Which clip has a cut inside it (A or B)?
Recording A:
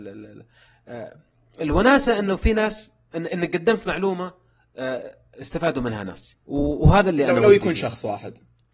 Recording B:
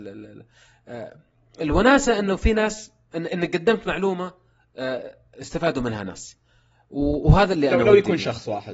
A